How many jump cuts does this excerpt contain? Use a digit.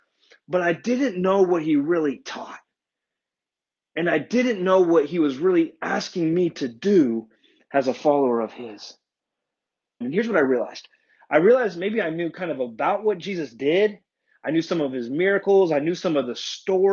1